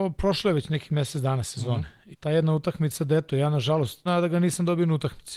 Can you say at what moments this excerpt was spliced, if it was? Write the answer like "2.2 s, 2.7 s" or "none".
2.1 s, 4.1 s